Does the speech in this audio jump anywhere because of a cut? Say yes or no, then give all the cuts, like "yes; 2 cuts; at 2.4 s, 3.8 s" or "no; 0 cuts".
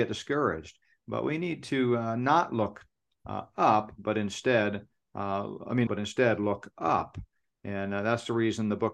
yes; 1 cut; at 5.9 s